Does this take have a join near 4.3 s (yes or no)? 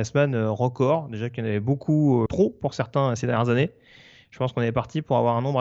no